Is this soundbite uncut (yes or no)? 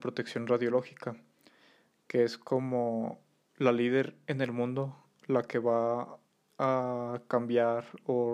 yes